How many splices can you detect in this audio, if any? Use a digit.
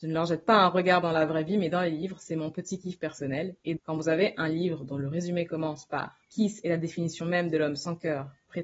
2